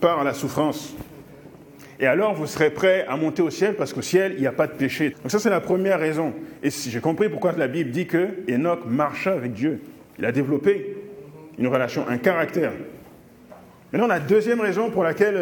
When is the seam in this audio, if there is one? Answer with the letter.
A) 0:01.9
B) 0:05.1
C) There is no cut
B